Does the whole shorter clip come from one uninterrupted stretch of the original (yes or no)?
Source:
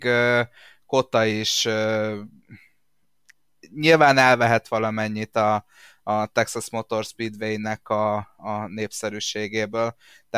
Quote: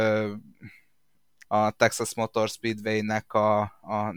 no